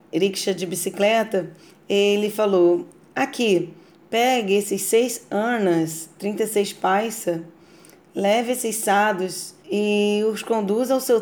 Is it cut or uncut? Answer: cut